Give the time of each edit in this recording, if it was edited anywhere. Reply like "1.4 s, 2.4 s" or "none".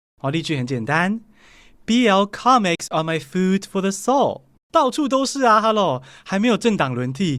4.6 s